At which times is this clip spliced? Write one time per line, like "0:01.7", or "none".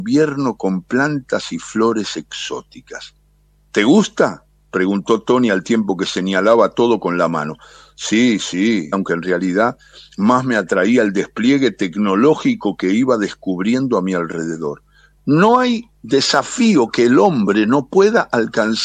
0:08.9
0:15.2